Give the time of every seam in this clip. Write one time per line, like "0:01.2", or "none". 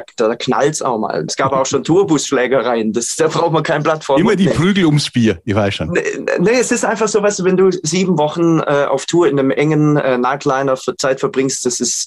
0:01.3